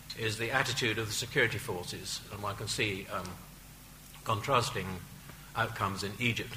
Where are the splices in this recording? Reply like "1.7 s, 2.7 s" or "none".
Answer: none